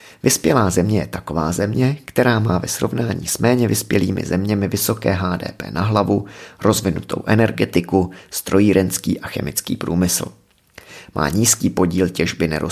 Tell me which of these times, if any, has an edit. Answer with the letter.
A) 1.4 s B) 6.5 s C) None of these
C